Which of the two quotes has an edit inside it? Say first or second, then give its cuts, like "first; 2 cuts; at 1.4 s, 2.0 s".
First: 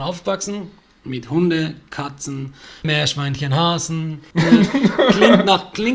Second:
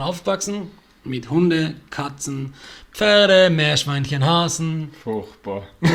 first; 2 cuts; at 2.8 s, 4.3 s